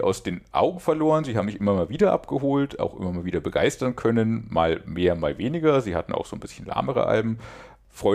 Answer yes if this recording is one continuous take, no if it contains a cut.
yes